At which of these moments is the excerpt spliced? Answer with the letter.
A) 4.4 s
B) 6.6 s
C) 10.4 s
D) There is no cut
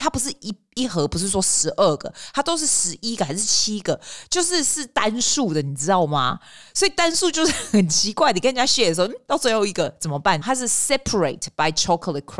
C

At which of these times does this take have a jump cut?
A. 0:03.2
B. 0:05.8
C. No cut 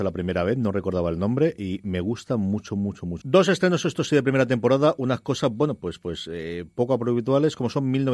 A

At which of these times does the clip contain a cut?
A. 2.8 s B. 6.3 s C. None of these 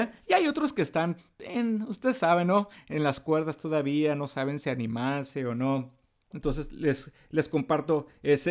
B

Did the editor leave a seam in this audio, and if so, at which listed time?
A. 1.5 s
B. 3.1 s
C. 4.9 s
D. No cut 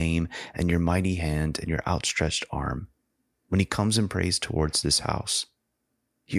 D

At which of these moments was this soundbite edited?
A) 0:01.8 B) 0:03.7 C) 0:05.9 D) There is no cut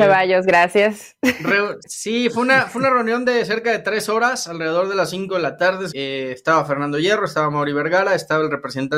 C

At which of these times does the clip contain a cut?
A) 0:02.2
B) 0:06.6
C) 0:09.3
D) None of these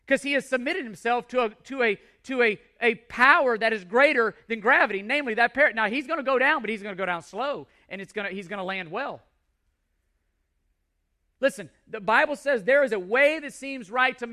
D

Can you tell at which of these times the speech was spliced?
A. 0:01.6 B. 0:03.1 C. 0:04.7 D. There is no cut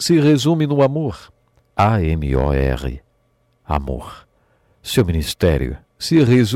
A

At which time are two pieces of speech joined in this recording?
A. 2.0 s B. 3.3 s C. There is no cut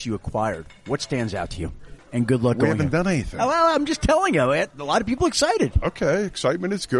A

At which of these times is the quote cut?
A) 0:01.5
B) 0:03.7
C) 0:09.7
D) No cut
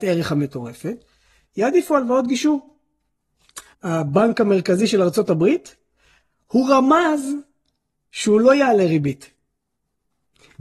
B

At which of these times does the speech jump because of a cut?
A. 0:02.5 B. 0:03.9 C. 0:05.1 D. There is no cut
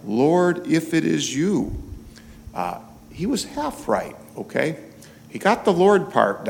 D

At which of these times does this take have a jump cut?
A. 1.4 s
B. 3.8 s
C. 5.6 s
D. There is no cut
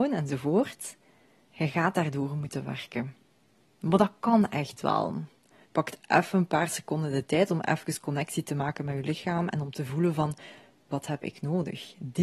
C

